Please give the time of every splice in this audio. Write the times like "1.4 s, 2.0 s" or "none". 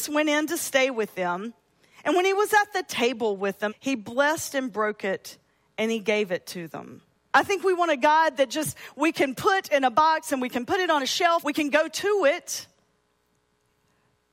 3.7 s, 7.3 s, 11.4 s